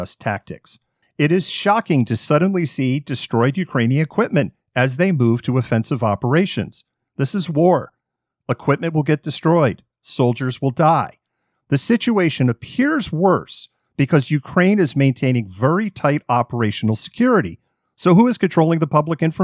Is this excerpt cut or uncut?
cut